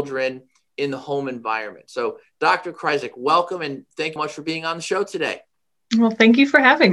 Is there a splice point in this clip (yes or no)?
yes